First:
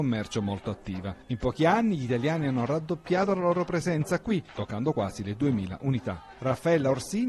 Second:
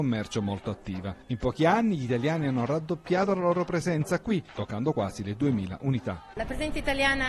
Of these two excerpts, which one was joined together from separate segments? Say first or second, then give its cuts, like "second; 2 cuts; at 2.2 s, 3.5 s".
second; 1 cut; at 6.3 s